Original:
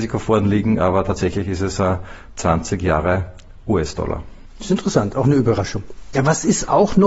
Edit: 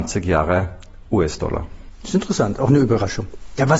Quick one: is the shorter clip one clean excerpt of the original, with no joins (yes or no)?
yes